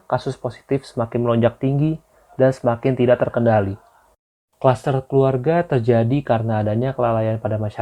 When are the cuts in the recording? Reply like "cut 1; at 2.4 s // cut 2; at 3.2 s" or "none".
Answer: cut 1; at 4.5 s